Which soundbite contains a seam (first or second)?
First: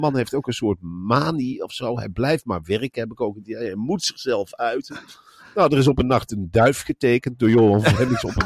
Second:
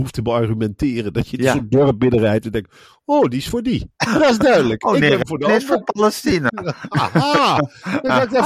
second